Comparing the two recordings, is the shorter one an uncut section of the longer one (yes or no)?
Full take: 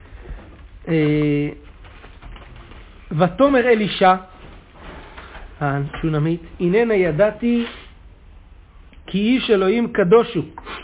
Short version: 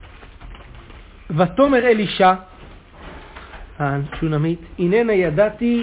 yes